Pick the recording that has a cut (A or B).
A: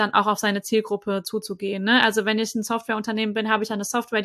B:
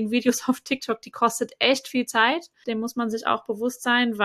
B